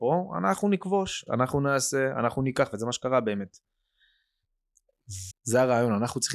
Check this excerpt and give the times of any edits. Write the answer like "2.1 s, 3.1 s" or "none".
1.3 s, 5.3 s